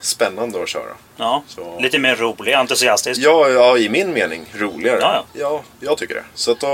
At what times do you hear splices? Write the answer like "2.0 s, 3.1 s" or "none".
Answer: 5.3 s